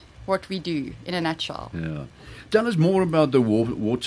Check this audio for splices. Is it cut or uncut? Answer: uncut